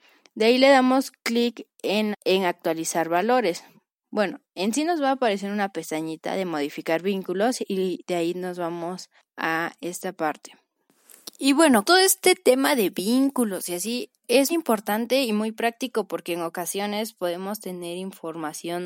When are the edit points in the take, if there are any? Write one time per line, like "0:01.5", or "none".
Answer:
0:02.1
0:11.8
0:14.5